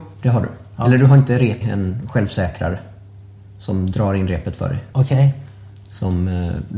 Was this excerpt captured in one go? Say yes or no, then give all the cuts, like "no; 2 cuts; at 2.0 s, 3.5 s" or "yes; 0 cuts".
no; 2 cuts; at 1.6 s, 4.9 s